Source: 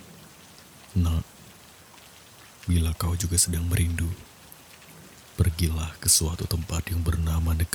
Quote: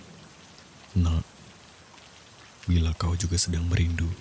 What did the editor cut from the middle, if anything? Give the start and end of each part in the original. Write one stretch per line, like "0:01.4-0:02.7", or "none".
none